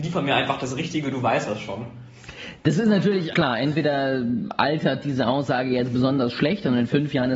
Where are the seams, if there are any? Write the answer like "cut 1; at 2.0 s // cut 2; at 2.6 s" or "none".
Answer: cut 1; at 3.3 s